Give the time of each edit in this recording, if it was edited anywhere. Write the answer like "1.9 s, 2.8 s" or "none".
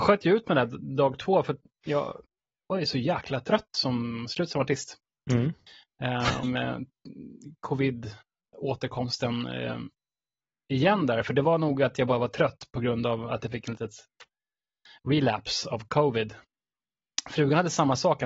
6.4 s